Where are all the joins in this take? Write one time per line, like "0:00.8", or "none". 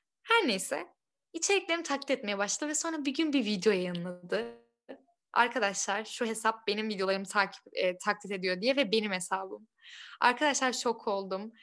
none